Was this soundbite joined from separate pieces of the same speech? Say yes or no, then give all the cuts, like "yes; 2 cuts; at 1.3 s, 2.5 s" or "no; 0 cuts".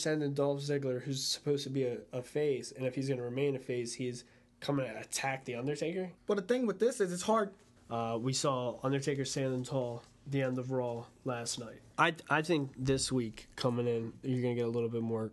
yes; 3 cuts; at 6.2 s, 7.8 s, 11.9 s